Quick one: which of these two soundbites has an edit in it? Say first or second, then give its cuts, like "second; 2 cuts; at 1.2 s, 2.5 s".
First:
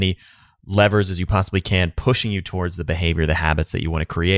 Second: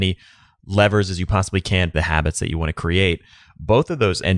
second; 1 cut; at 1.9 s